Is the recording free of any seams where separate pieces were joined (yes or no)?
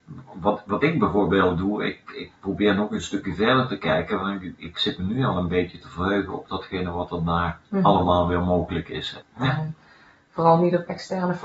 no